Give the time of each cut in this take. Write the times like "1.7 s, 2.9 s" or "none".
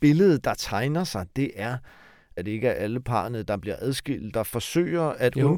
2.4 s, 4.3 s